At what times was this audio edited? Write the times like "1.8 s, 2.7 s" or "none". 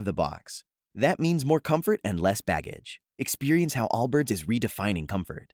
3.1 s